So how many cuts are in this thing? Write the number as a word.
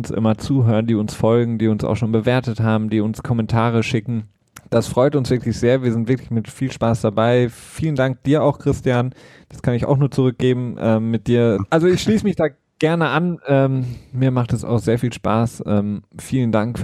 one